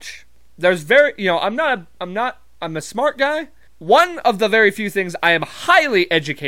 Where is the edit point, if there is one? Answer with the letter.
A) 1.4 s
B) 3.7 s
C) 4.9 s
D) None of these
B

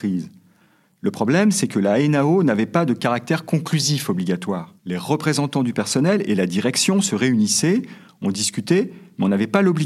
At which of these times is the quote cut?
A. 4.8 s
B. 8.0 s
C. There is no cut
A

